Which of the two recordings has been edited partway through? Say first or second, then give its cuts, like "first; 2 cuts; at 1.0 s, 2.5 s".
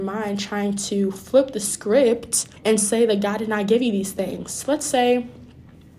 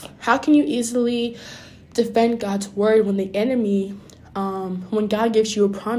first; 1 cut; at 2.6 s